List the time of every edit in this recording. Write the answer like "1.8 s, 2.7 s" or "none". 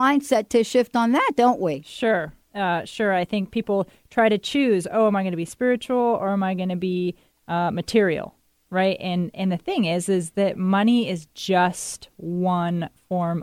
none